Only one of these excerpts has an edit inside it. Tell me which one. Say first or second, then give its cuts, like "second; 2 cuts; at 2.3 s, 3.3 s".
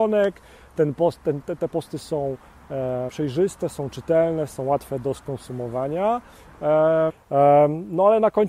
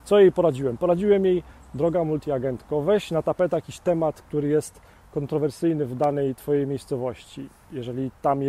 first; 2 cuts; at 3.1 s, 7.1 s